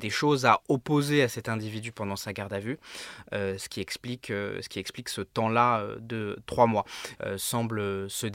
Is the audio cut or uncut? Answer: cut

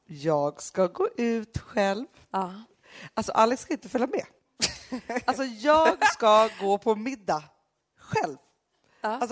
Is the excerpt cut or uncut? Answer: uncut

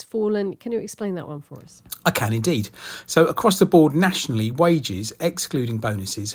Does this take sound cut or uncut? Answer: uncut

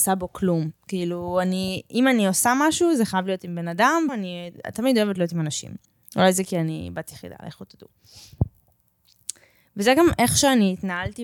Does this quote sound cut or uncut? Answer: cut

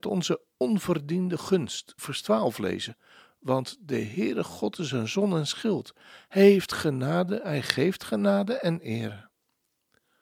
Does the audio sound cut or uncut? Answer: cut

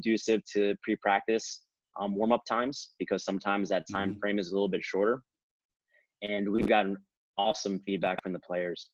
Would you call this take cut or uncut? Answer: uncut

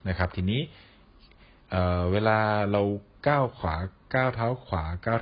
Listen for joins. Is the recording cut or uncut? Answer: uncut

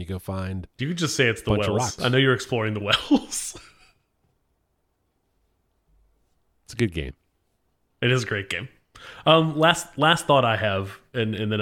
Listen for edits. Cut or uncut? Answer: uncut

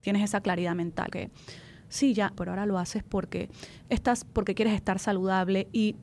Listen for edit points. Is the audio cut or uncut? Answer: cut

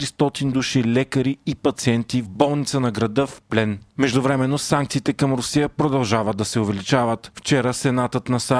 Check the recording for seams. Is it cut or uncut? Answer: uncut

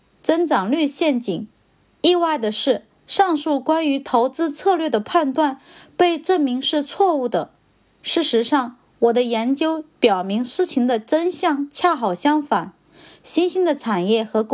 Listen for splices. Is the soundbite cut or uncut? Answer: uncut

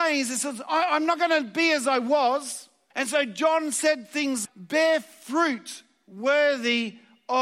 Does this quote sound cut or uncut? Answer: cut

